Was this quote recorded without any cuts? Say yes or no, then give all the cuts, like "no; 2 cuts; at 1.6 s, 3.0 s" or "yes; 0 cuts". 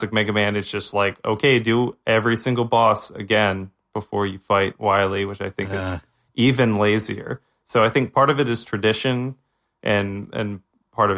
yes; 0 cuts